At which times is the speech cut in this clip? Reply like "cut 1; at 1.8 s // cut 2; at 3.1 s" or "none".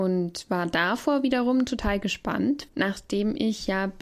cut 1; at 2.7 s